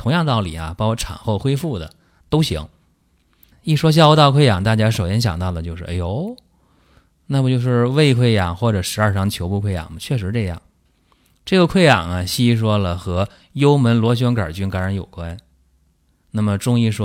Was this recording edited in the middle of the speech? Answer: yes; 1 cut; at 3.5 s

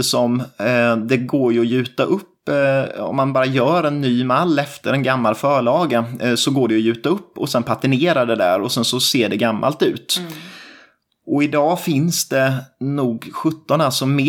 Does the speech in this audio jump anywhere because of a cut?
no; 0 cuts

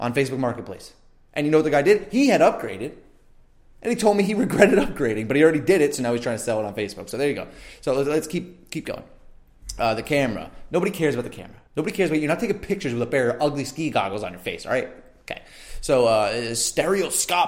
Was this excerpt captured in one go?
no; 1 cut; at 11.7 s

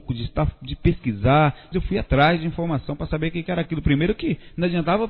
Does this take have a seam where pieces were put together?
yes; 1 cut; at 1.7 s

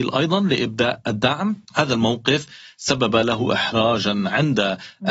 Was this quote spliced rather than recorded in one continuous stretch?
yes; 1 cut; at 1.6 s

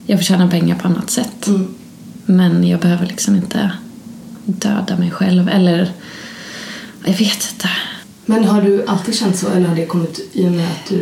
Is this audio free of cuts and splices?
yes; 0 cuts

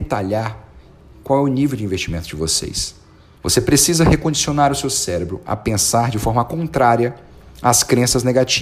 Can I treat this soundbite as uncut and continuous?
no; 1 cut; at 3.4 s

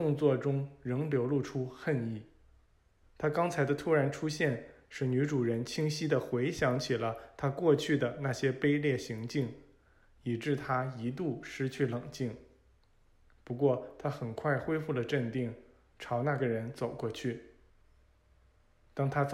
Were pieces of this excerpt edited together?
yes; 1 cut; at 3.0 s

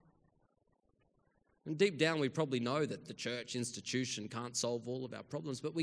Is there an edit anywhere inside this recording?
no; 0 cuts

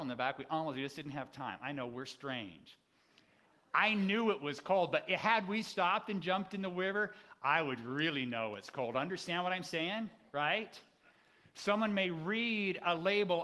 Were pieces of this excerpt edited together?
no; 0 cuts

